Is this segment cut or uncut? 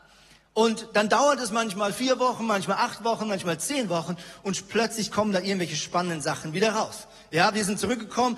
uncut